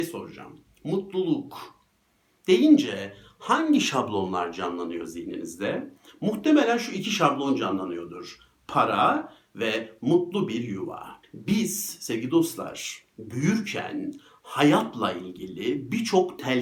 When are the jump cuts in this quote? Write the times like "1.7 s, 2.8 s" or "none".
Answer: 11.2 s